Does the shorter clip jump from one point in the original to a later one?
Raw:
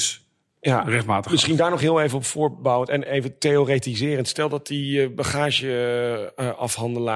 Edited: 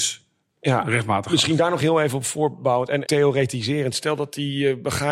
yes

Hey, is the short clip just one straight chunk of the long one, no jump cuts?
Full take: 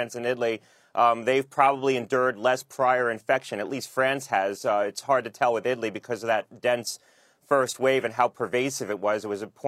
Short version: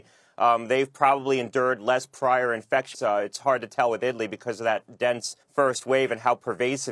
no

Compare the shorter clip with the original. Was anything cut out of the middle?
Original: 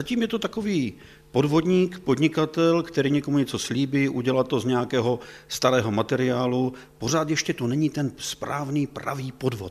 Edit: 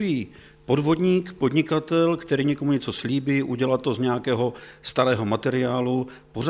no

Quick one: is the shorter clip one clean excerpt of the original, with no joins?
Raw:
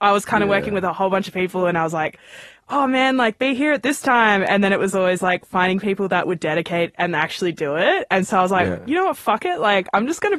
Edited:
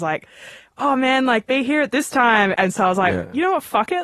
no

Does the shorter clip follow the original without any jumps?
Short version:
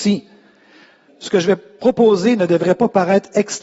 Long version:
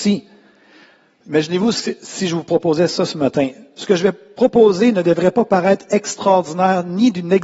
no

